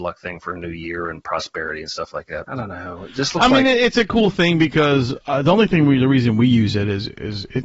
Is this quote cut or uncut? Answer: cut